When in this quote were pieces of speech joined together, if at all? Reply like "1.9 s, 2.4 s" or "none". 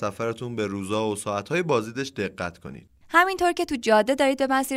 3.0 s